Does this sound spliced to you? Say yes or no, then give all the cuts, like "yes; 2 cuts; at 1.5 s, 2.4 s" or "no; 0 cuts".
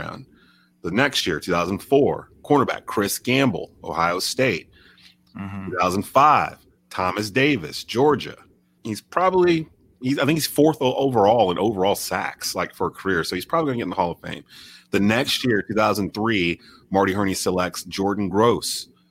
yes; 1 cut; at 8.8 s